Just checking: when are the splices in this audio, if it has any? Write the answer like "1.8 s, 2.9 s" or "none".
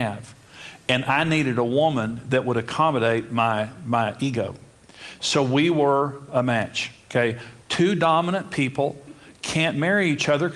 7.6 s